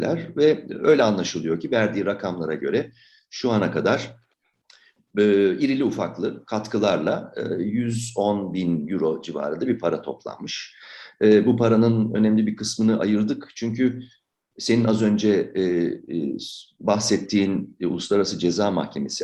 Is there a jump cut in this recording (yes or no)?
no